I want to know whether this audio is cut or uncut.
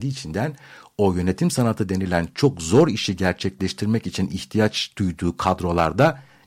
uncut